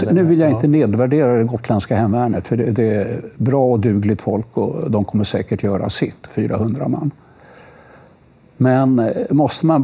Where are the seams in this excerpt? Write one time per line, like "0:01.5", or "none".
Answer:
none